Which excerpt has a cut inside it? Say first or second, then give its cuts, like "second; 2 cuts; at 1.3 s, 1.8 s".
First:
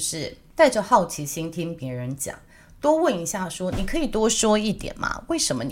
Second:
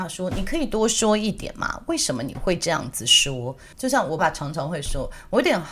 second; 1 cut; at 4.2 s